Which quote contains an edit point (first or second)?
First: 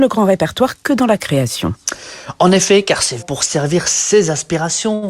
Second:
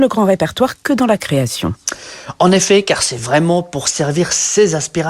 first